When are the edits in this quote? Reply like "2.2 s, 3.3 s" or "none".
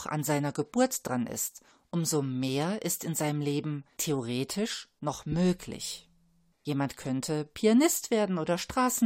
6.5 s